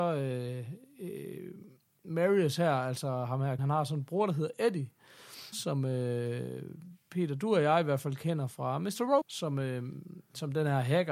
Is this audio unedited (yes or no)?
no